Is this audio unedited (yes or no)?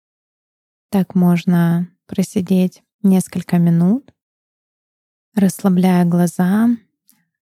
yes